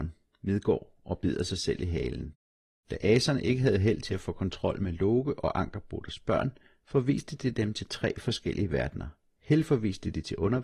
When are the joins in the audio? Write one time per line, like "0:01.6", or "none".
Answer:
none